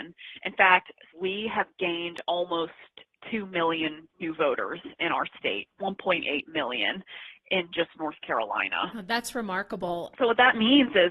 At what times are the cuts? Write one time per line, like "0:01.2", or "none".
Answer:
0:01.1
0:10.1